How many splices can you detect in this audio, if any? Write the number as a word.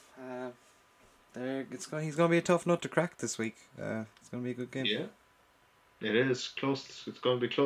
zero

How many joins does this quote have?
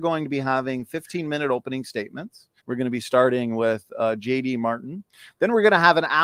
one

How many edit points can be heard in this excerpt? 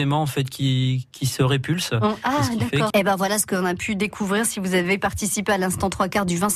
one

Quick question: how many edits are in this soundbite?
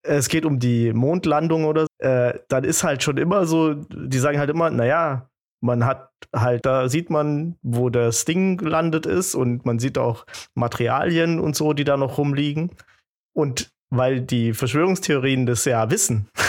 two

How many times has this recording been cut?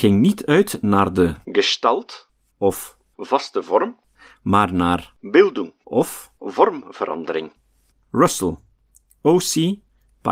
zero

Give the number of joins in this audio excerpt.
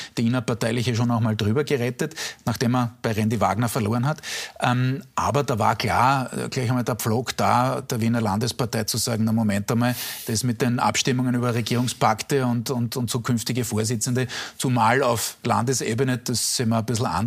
zero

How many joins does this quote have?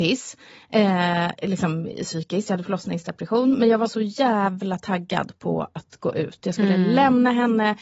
zero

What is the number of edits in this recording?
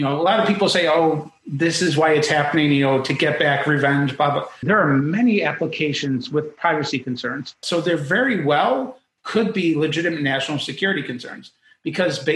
two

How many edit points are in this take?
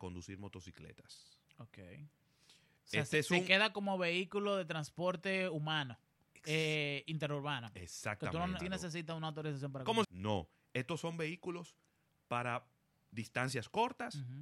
two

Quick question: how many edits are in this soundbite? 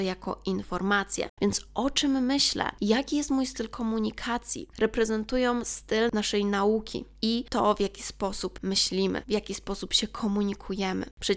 two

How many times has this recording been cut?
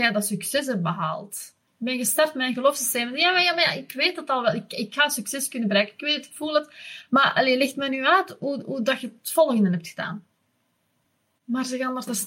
one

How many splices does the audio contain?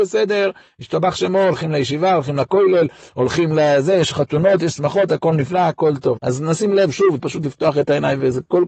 two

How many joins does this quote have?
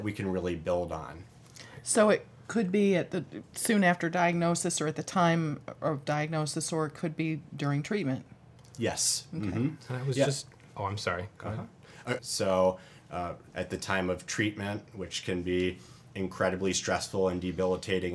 two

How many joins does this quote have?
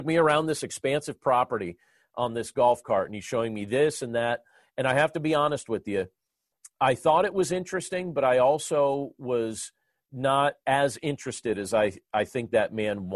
zero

